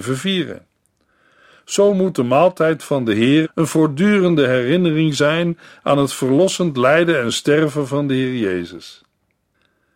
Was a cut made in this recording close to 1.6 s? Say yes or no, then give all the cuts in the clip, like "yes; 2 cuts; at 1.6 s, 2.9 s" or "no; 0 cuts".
no; 1 cut; at 3.4 s